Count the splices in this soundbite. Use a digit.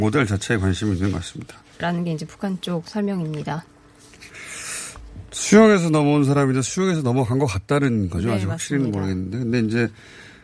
1